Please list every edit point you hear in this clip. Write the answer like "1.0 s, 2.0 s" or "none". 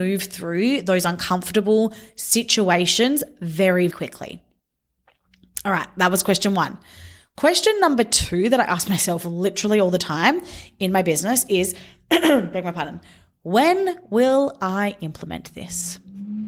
3.9 s